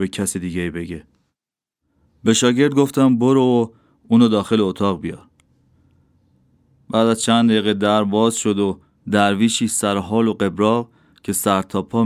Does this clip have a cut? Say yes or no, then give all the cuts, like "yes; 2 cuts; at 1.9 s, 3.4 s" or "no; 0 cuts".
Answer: no; 0 cuts